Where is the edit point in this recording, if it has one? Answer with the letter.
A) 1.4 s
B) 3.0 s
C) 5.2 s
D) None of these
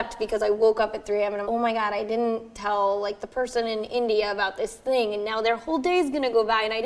A